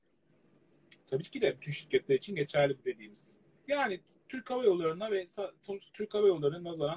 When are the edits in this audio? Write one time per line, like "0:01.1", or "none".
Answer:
0:01.6
0:03.6